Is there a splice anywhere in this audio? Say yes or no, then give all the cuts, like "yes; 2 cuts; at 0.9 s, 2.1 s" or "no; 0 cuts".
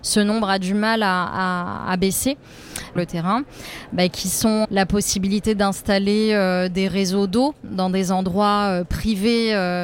yes; 2 cuts; at 3.0 s, 4.6 s